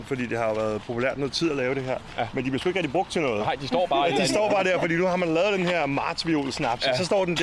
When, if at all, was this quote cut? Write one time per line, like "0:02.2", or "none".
none